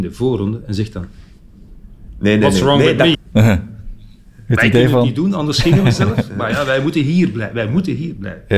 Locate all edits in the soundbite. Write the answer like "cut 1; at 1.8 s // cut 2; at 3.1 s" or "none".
cut 1; at 3.1 s